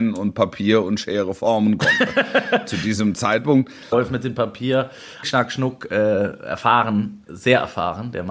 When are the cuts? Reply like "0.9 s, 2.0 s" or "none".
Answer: 3.9 s, 5.2 s, 7.3 s